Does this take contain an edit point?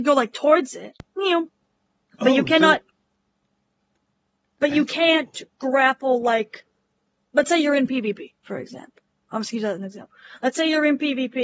no; 0 cuts

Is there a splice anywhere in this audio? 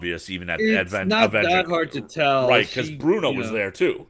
no; 0 cuts

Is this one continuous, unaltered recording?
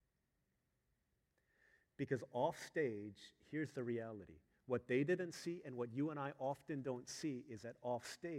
yes; 0 cuts

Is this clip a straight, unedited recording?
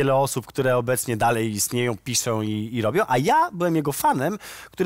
yes; 0 cuts

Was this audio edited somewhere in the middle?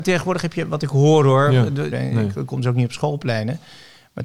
yes; 1 cut; at 1.9 s

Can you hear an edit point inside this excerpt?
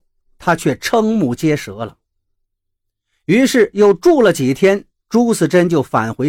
no; 0 cuts

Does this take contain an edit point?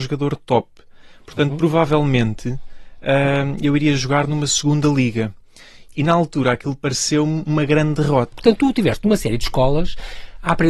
yes; 2 cuts; at 5.9 s, 8.3 s

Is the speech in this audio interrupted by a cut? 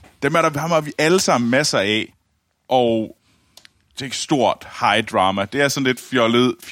yes; 1 cut; at 3.9 s

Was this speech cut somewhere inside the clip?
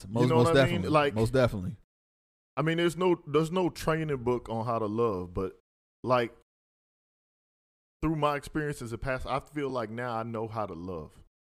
no; 0 cuts

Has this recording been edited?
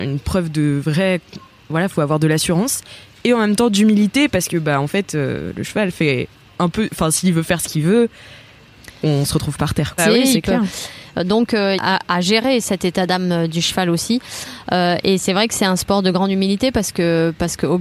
yes; 2 cuts; at 10.0 s, 11.8 s

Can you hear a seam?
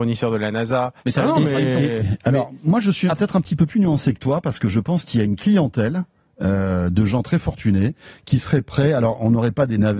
yes; 1 cut; at 1.0 s

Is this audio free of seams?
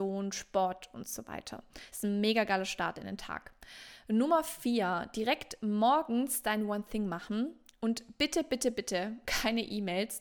yes; 0 cuts

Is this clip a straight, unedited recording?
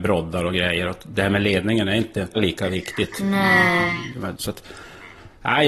no; 2 cuts; at 2.3 s, 4.3 s

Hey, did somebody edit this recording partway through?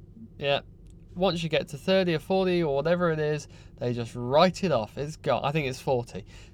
no; 0 cuts

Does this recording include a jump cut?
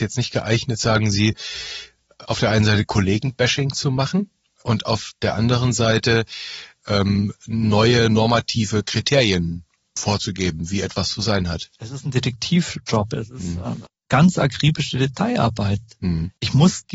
yes; 1 cut; at 13.9 s

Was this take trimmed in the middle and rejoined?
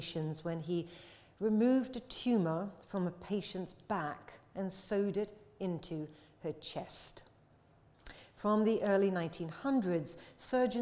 no; 0 cuts

